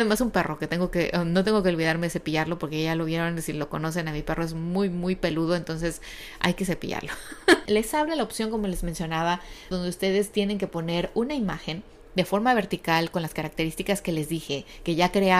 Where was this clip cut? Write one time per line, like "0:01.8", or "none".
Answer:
0:07.7
0:09.7